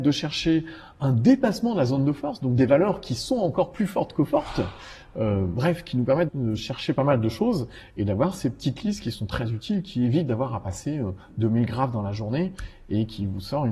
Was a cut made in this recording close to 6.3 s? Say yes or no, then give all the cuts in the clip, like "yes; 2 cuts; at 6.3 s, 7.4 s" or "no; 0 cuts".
yes; 1 cut; at 6.3 s